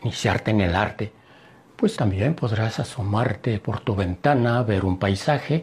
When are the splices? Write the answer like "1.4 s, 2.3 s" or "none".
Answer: 2.0 s